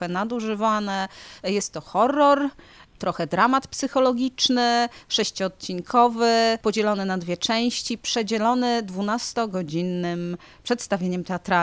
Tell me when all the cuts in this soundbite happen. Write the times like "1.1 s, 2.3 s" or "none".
none